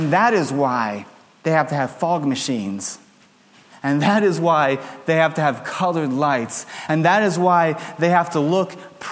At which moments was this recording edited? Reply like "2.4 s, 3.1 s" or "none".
none